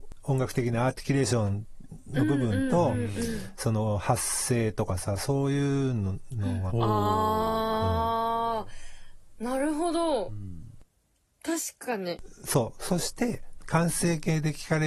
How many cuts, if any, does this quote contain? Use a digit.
1